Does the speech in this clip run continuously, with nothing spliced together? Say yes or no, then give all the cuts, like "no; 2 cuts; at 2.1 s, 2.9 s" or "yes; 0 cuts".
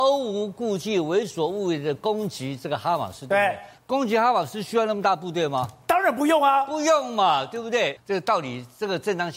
no; 2 cuts; at 3.8 s, 8.0 s